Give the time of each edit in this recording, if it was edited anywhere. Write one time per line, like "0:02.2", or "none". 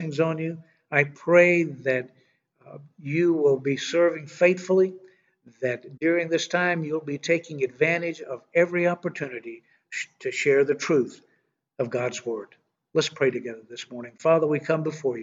none